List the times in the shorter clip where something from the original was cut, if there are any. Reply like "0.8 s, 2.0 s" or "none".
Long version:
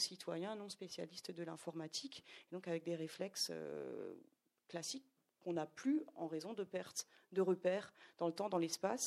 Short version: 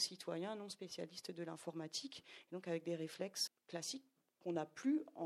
3.5 s

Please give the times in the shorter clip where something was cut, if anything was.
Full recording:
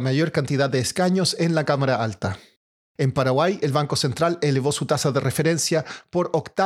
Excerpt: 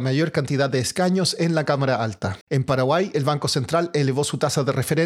2.4 s

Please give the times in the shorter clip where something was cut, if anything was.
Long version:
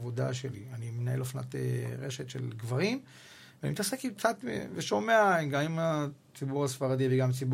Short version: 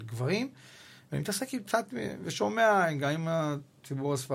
none

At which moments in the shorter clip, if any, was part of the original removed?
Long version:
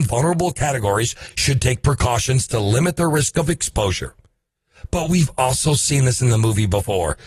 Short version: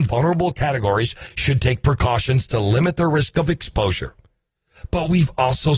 none

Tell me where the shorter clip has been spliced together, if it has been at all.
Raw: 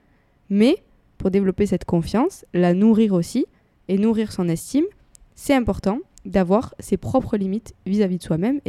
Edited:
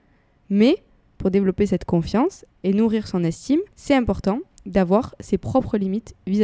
2.5 s, 3.7 s

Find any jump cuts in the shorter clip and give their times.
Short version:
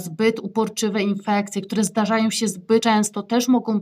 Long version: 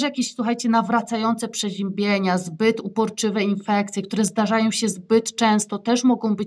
2.8 s

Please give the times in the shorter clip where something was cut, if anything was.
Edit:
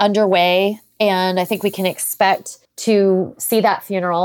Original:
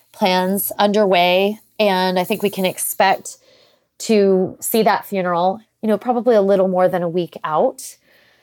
2.6 s

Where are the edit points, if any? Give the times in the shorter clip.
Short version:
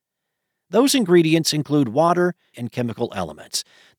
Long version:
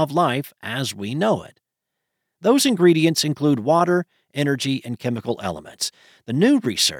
2.5 s

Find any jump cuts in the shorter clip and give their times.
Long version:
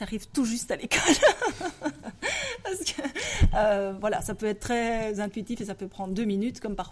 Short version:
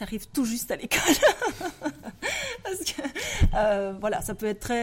none

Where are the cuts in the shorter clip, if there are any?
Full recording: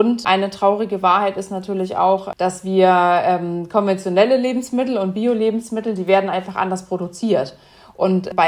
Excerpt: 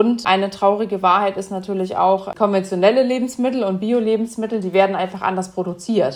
2.3 s

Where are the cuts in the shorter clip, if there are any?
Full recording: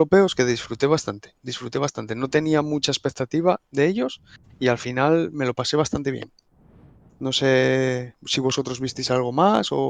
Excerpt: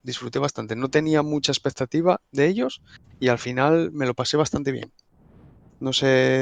none

